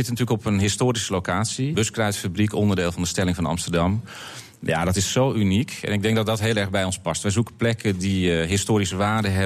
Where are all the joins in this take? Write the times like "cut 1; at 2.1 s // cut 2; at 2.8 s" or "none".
cut 1; at 1.7 s